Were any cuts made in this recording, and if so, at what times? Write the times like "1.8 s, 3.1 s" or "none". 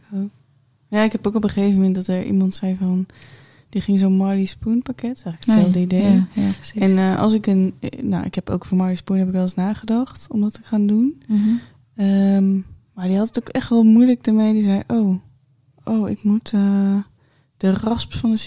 none